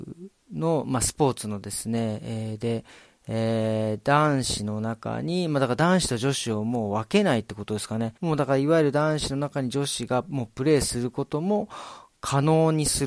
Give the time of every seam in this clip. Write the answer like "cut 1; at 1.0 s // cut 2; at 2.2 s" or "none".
cut 1; at 8.2 s

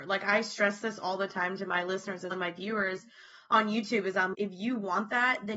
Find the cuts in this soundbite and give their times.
cut 1; at 2.3 s // cut 2; at 4.3 s

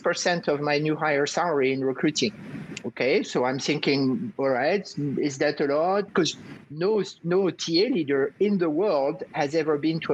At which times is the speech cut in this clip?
cut 1; at 6.1 s

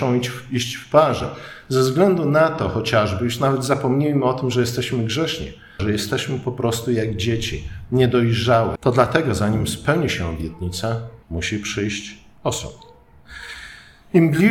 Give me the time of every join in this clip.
cut 1; at 5.8 s // cut 2; at 8.8 s // cut 3; at 11.2 s

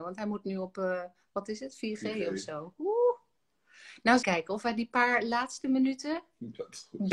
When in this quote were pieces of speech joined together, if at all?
cut 1; at 4.2 s

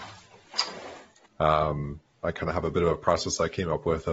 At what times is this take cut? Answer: cut 1; at 1.3 s

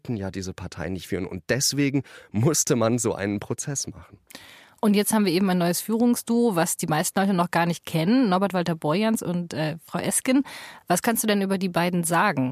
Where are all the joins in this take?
none

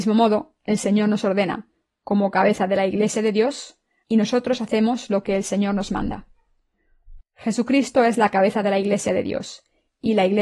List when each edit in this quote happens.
cut 1; at 4.0 s // cut 2; at 7.2 s

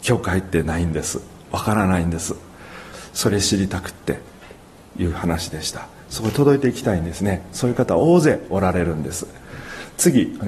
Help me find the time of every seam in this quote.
none

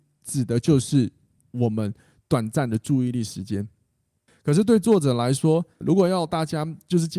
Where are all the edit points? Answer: cut 1; at 4.3 s // cut 2; at 5.8 s

